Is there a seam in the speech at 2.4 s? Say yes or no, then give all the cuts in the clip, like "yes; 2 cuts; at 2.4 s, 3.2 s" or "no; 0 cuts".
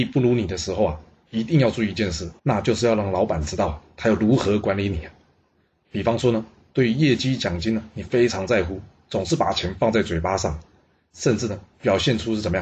yes; 1 cut; at 2.4 s